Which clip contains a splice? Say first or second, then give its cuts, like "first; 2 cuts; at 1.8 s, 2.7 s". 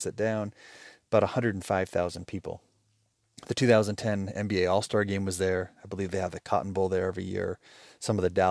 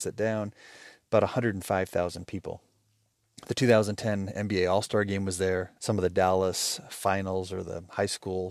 second; 1 cut; at 5.8 s